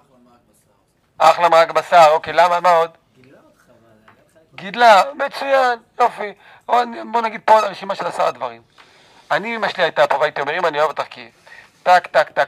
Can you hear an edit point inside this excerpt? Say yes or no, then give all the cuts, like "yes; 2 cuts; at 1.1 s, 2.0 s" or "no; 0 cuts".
no; 0 cuts